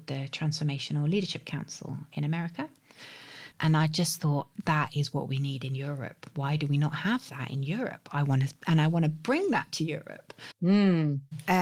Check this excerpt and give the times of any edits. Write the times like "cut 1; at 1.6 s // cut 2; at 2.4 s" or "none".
cut 1; at 3.5 s